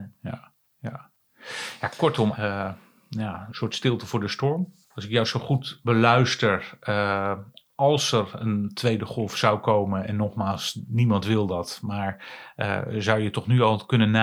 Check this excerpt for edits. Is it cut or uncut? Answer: cut